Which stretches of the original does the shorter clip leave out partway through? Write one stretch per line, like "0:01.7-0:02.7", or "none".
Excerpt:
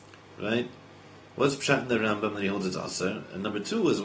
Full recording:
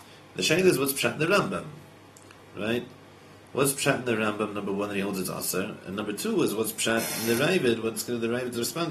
0:04.5-0:04.9